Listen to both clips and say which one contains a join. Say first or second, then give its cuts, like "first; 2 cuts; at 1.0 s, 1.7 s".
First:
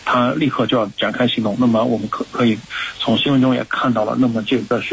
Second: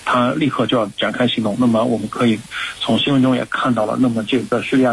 second; 1 cut; at 2.1 s